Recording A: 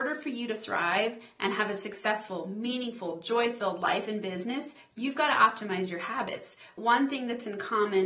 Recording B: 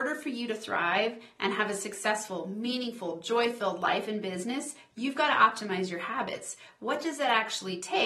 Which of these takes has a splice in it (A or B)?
A